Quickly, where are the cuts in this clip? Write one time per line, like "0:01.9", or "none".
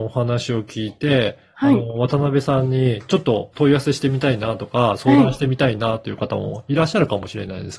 0:03.5